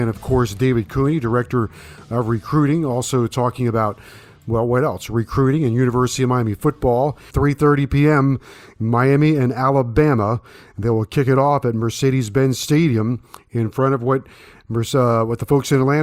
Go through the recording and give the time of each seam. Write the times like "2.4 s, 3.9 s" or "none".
7.3 s